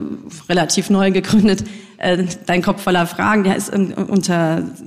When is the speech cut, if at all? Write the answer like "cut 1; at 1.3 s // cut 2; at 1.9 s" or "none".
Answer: none